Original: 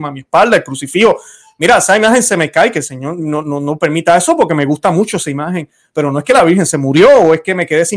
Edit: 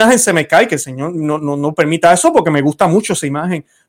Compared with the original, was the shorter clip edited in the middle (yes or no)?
no